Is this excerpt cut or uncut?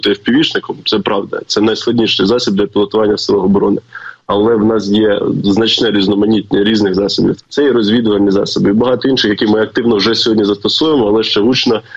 cut